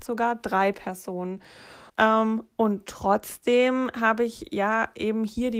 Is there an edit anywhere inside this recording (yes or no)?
yes